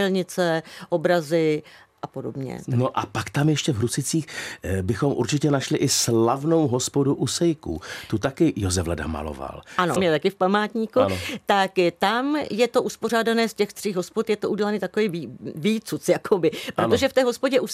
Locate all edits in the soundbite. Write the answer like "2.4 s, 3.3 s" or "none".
10.0 s